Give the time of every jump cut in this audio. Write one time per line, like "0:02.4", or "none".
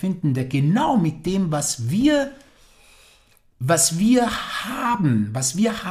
none